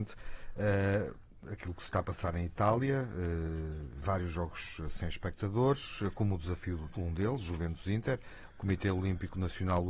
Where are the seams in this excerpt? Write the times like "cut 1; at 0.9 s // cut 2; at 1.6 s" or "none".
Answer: cut 1; at 6.9 s // cut 2; at 8.5 s